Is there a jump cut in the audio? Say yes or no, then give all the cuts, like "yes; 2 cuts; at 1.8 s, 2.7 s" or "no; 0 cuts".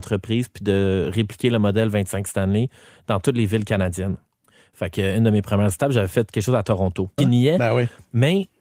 yes; 1 cut; at 7.2 s